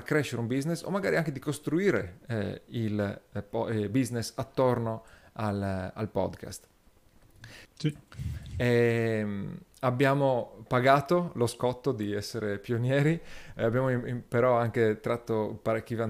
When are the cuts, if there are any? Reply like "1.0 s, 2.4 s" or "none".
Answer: 7.6 s